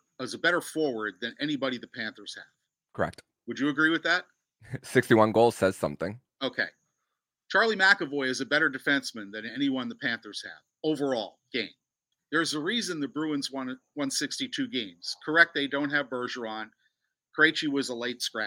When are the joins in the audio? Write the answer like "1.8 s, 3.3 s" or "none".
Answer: 12.1 s